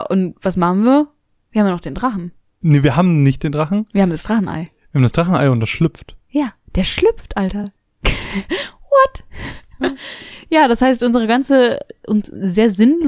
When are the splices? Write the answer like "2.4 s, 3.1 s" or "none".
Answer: none